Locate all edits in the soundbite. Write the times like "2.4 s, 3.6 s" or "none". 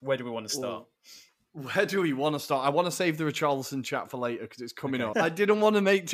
5.1 s